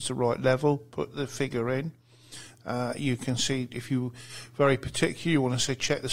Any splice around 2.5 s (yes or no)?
no